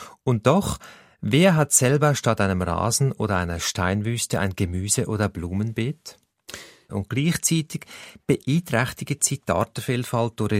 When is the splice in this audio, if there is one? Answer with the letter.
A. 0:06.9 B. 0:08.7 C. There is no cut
A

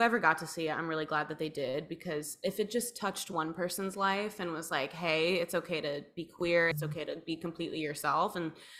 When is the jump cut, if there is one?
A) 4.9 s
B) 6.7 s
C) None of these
B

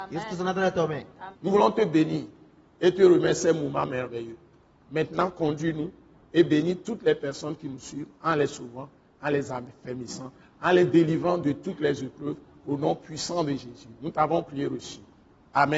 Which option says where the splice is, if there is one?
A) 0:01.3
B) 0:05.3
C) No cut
A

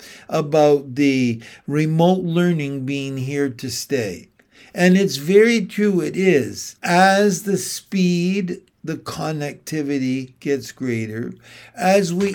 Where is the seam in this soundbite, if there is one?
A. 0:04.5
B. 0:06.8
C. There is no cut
B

